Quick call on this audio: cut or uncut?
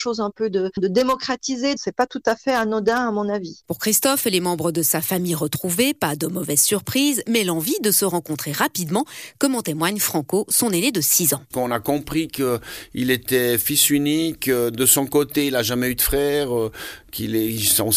cut